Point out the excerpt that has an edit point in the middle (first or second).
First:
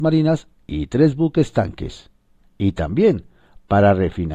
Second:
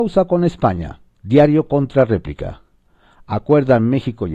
second